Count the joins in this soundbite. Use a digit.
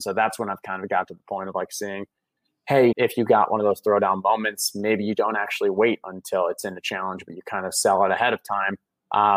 1